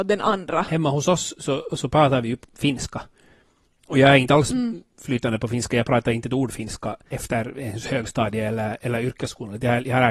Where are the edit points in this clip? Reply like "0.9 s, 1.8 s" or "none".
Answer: none